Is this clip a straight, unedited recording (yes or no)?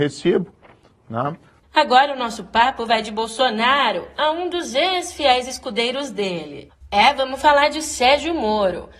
no